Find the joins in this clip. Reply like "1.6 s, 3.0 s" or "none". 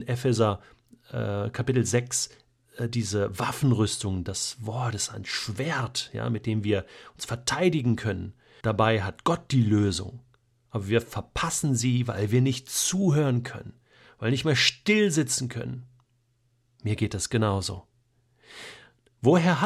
8.6 s